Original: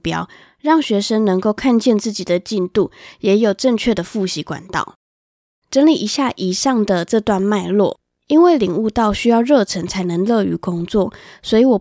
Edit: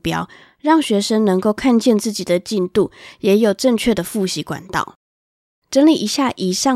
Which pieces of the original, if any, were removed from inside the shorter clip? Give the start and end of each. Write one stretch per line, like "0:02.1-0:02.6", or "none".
none